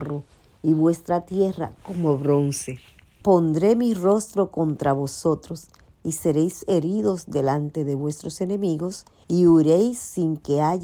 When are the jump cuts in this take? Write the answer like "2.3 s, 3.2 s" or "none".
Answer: 3.2 s, 9.2 s